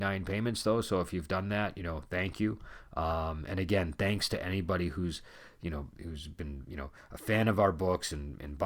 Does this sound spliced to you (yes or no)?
no